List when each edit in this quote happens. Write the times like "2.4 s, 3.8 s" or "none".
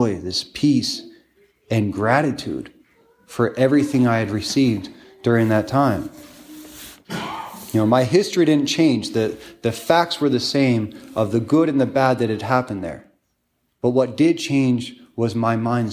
none

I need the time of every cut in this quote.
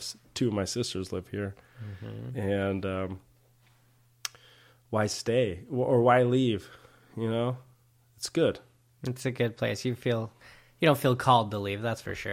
none

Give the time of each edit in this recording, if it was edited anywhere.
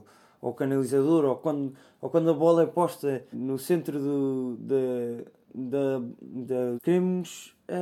3.3 s, 5.5 s, 6.8 s

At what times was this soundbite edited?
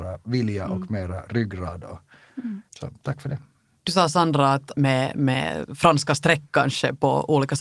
2.7 s, 4.7 s

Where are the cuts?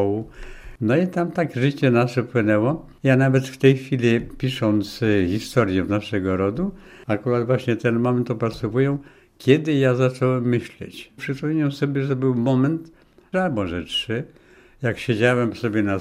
11.2 s, 13.3 s

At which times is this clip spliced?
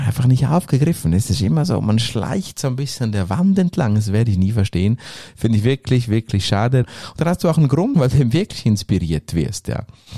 6.8 s, 7.9 s

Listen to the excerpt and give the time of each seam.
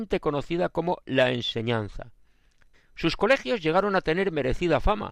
2.7 s

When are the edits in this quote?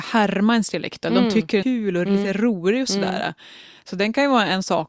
1.6 s

